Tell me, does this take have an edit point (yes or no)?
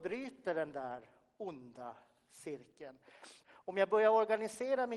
yes